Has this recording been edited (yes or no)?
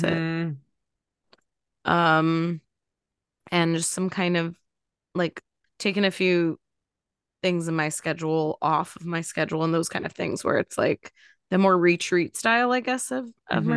yes